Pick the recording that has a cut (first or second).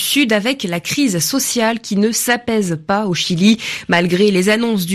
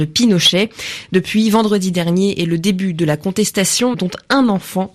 second